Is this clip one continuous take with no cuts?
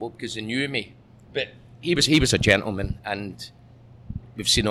no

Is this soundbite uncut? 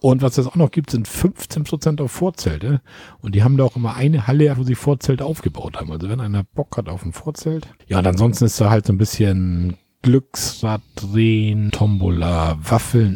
no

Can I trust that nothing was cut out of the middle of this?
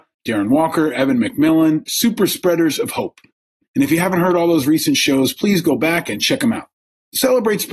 no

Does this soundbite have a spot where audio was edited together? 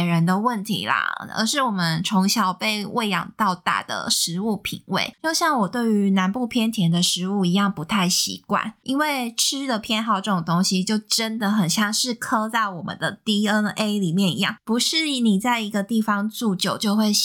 no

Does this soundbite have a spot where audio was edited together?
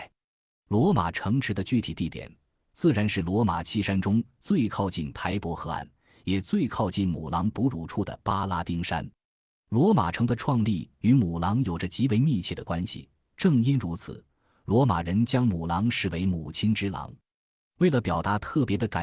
no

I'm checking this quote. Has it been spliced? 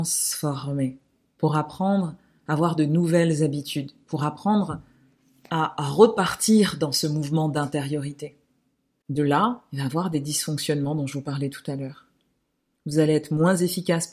yes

